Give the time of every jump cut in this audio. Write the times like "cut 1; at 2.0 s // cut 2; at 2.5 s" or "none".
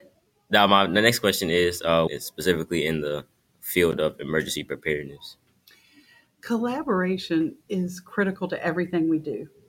cut 1; at 2.1 s